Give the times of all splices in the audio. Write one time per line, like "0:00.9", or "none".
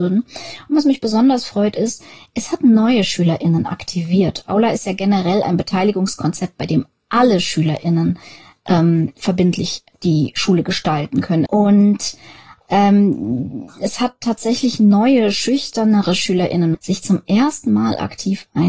0:11.5
0:16.7

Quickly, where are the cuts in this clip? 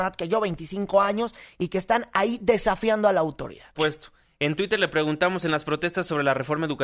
0:03.7

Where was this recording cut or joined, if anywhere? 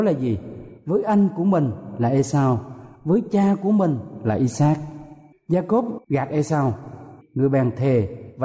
0:07.2

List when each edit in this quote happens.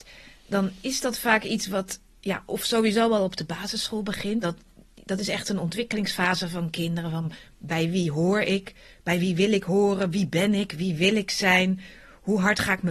0:04.4

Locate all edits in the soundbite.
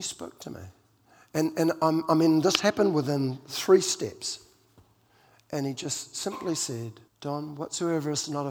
0:07.1

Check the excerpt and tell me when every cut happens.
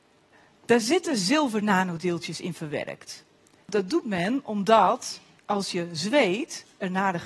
none

